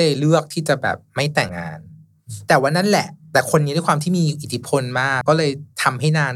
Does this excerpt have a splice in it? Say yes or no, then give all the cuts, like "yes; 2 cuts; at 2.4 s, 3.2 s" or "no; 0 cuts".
yes; 2 cuts; at 1.5 s, 5.2 s